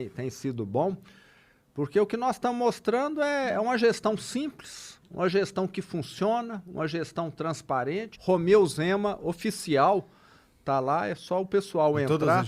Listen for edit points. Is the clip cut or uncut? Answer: cut